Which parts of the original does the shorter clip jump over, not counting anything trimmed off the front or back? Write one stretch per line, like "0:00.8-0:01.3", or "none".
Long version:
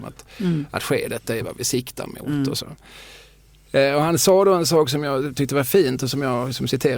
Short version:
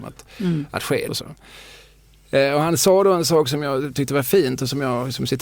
0:01.1-0:02.5